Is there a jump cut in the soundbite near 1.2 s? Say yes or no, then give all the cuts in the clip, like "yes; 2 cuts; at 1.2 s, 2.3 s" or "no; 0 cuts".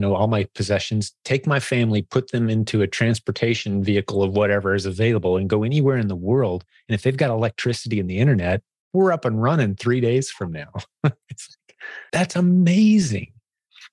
no; 1 cut; at 12.1 s